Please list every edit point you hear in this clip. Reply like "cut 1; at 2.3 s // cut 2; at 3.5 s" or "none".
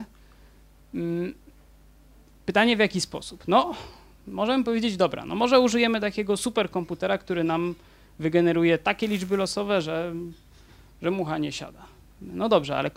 none